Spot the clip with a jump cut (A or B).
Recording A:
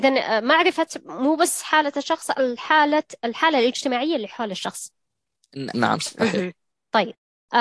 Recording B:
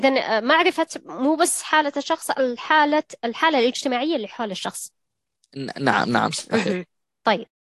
A